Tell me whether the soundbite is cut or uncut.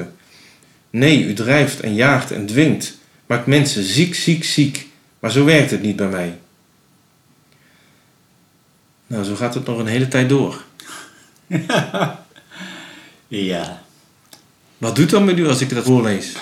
uncut